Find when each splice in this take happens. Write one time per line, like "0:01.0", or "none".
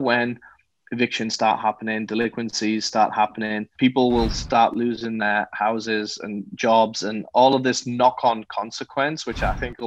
0:03.8